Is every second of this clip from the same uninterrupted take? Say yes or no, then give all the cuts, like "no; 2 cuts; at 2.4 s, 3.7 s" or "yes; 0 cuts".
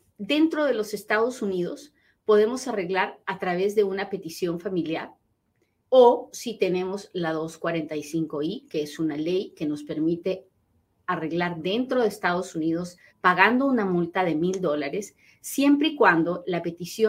no; 2 cuts; at 5.8 s, 13.1 s